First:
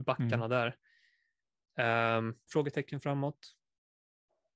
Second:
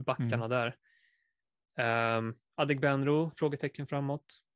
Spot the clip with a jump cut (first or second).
first